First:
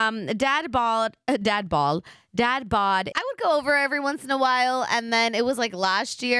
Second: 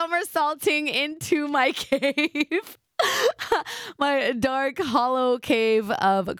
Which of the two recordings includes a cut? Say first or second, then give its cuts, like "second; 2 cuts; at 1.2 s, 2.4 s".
first; 1 cut; at 3.1 s